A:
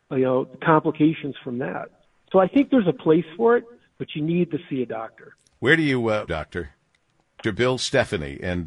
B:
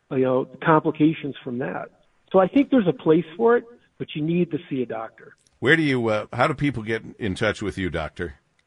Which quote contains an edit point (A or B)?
A